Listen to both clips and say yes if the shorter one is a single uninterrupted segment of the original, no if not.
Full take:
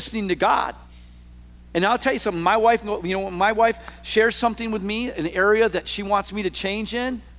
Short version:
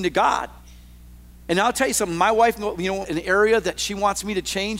no